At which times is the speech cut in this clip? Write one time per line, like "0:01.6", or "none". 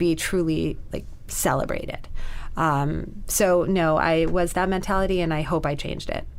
none